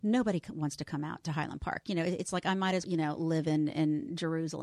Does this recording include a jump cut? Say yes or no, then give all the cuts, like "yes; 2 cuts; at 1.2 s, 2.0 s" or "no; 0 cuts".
yes; 1 cut; at 2.8 s